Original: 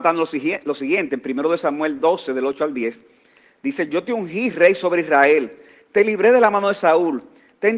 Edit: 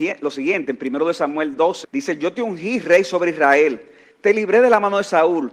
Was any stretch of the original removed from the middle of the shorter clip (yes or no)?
yes